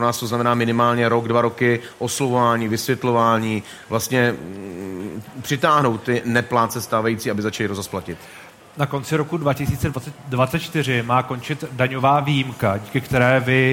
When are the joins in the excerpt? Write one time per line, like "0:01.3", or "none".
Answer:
none